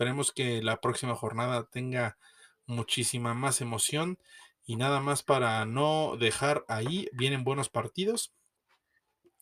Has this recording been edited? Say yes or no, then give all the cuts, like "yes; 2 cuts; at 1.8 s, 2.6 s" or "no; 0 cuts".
no; 0 cuts